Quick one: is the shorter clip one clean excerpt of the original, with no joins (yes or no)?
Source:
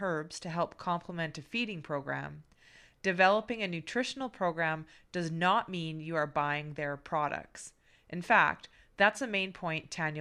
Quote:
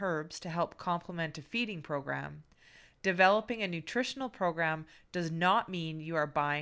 yes